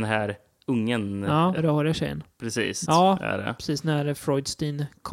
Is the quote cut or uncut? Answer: cut